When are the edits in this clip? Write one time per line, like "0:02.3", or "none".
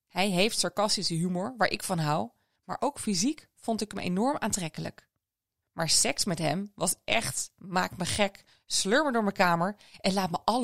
0:05.6

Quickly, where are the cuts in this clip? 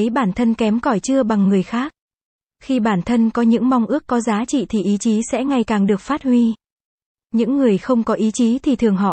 none

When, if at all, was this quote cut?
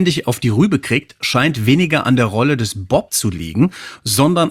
none

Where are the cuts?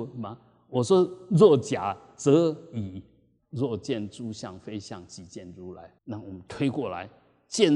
0:03.4
0:06.0

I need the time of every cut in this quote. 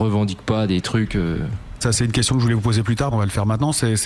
0:01.8
0:03.1

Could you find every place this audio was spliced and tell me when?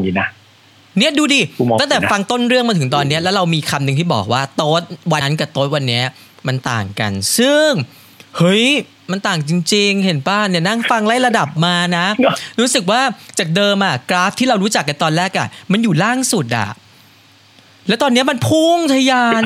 0:05.2

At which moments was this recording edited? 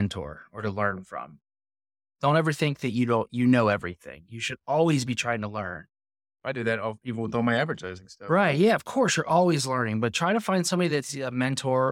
none

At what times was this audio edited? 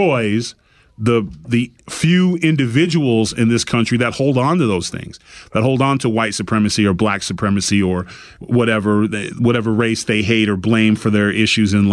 none

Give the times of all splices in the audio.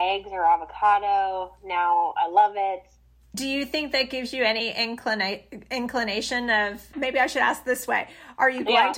0:03.3
0:06.9

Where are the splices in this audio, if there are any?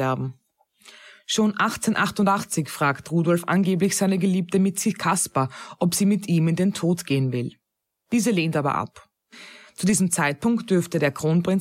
none

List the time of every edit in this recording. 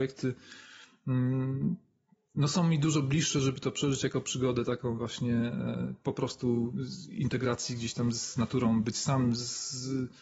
none

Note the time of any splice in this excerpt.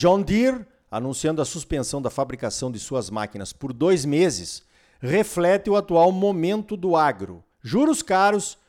0:07.5

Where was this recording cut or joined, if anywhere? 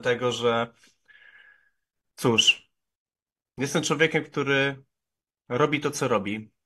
none

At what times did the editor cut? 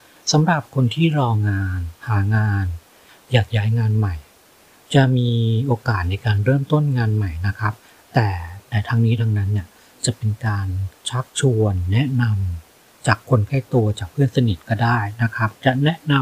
0:02.0
0:11.0

